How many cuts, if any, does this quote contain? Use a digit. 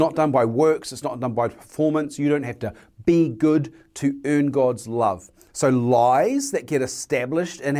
1